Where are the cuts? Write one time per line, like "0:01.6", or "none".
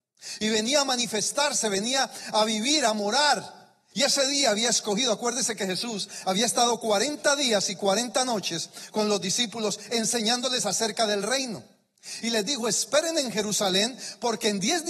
0:03.9

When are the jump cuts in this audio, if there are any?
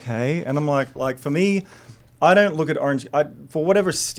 0:01.0

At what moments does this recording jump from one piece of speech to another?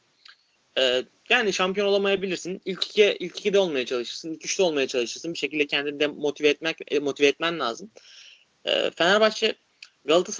0:05.3

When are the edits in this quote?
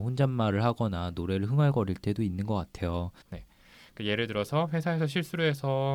0:03.2

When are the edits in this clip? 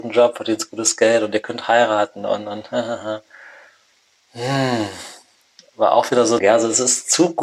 0:06.4

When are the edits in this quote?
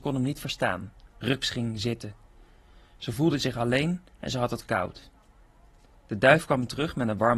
0:01.1

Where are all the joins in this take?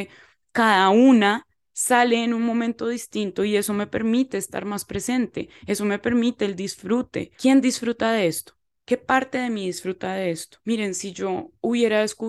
none

